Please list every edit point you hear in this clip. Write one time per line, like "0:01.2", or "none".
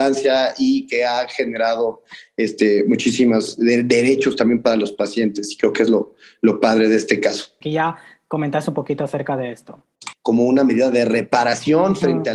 0:07.6
0:10.1